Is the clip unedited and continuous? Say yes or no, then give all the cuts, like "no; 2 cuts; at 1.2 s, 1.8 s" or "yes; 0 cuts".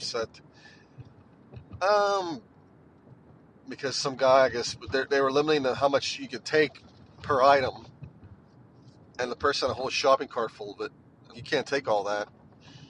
no; 1 cut; at 11.3 s